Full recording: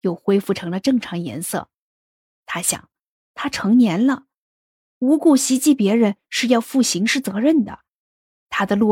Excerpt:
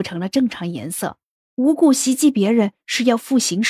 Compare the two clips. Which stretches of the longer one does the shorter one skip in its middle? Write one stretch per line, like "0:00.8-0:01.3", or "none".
0:01.9-0:04.8